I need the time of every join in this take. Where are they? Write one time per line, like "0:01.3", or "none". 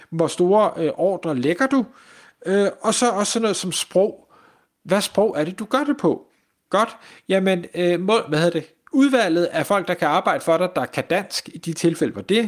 0:06.7